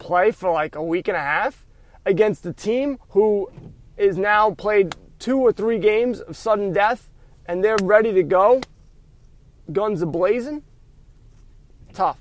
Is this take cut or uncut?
cut